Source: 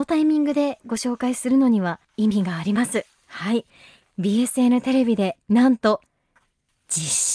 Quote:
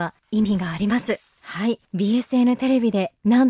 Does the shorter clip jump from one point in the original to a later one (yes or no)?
yes